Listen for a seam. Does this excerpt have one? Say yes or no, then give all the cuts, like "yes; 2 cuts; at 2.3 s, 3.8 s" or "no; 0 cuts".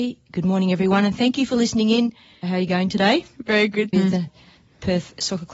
yes; 2 cuts; at 2.4 s, 3.9 s